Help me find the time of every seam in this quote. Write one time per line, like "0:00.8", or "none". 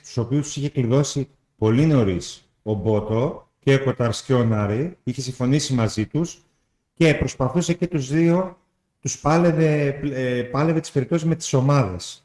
none

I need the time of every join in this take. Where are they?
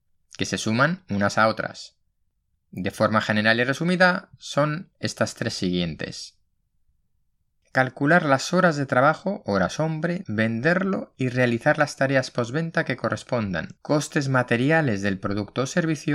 0:10.2
0:13.8

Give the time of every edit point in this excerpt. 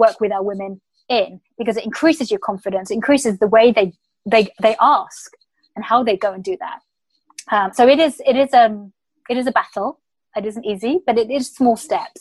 0:07.7

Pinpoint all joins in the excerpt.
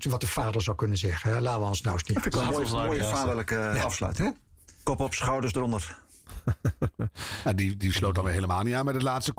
none

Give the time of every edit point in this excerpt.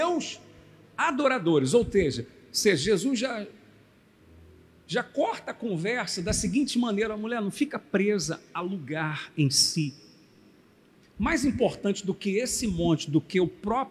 none

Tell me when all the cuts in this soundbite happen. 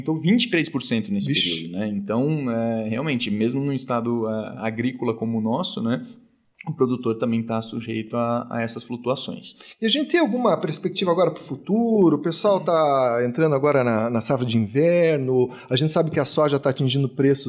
none

